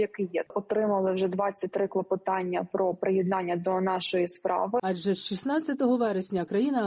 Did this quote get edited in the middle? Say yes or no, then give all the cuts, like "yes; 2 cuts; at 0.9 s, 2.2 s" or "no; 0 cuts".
yes; 1 cut; at 4.8 s